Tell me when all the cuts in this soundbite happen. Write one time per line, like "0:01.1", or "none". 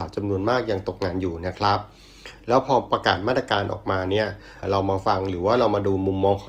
0:04.6